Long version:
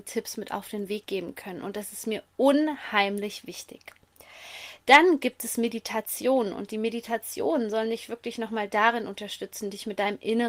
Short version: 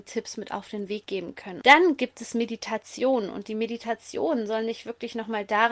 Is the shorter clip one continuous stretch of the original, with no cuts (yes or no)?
no